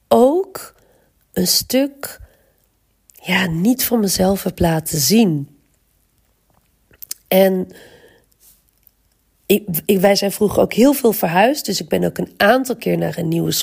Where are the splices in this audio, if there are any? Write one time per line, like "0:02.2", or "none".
none